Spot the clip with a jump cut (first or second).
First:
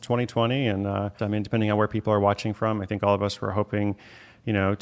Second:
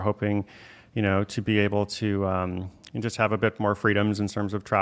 first